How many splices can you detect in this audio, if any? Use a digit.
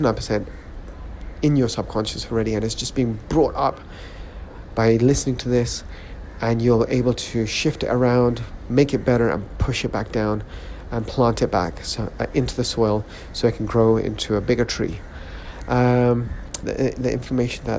1